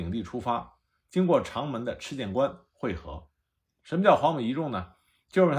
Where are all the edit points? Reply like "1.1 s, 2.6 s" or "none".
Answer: 3.7 s